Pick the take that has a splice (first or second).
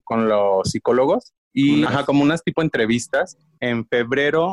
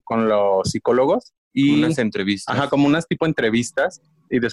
first